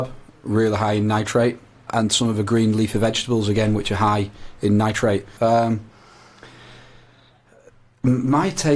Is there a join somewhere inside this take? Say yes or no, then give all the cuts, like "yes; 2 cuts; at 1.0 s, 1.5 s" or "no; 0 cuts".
yes; 2 cuts; at 1.9 s, 5.4 s